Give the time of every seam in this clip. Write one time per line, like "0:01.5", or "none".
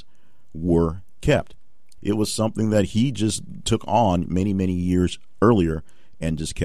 0:02.0